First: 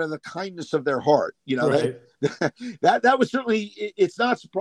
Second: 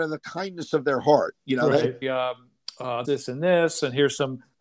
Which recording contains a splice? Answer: second; 2 cuts; at 2.0 s, 3.0 s

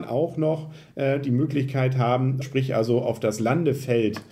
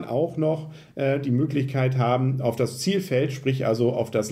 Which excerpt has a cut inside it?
first; 1 cut; at 2.4 s

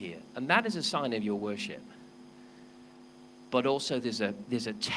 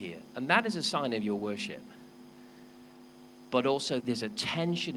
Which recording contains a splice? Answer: second; 1 cut; at 4.0 s

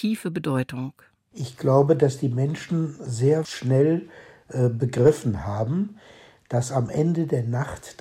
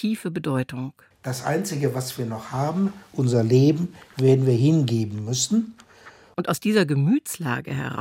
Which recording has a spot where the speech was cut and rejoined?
second; 2 cuts; at 1.1 s, 6.3 s

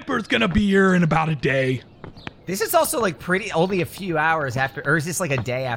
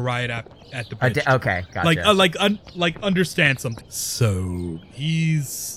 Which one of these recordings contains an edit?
second; 1 cut; at 3.8 s

